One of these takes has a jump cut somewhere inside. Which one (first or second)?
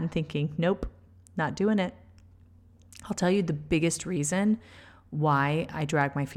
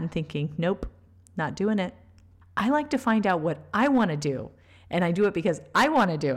second